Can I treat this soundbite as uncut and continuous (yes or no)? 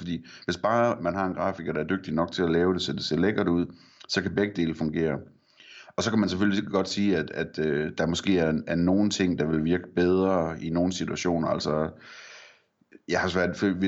yes